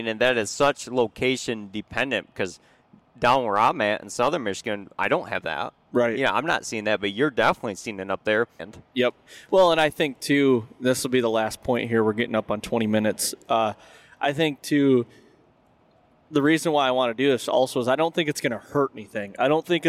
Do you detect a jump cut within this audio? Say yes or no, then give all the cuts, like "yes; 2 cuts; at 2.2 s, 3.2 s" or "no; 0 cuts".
yes; 1 cut; at 8.6 s